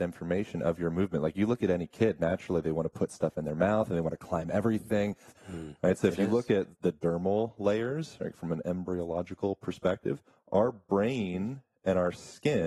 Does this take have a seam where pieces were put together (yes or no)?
yes